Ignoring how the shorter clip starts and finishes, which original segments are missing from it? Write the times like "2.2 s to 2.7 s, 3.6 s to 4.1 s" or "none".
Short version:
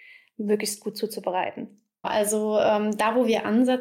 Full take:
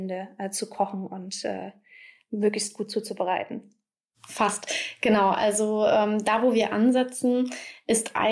4.0 s to 5.3 s